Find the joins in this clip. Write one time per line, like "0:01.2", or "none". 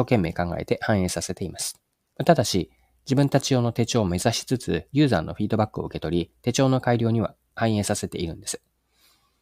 0:02.1

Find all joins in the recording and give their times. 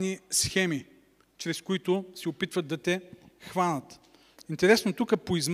0:04.4

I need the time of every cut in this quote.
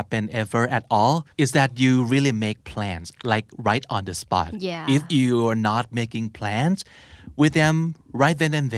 0:01.3

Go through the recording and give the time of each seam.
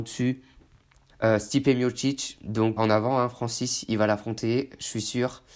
0:01.1
0:02.8

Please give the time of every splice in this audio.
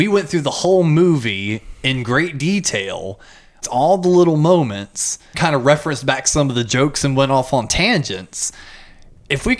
0:03.6
0:05.3

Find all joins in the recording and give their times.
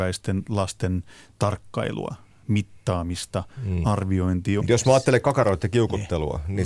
0:04.6

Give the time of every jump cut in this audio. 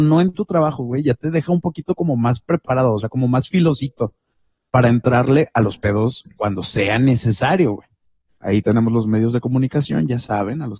0:08.3

